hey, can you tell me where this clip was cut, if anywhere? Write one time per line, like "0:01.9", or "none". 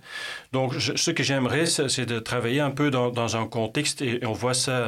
none